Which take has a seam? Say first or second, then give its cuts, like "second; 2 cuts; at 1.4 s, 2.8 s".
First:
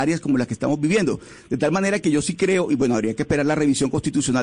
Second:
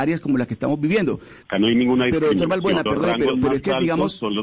second; 2 cuts; at 1.4 s, 2.9 s